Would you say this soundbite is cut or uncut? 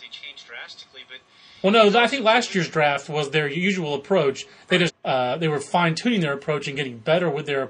cut